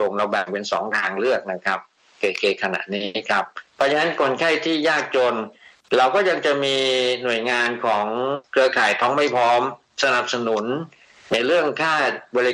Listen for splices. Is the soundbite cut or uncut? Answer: uncut